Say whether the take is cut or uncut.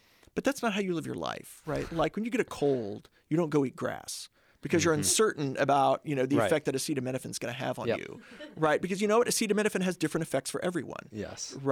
uncut